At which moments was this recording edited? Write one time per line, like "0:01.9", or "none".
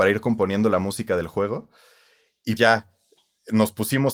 0:02.6